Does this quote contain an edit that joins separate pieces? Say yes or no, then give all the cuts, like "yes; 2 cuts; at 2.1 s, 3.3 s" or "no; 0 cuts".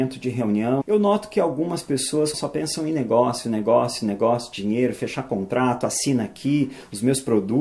yes; 1 cut; at 2.3 s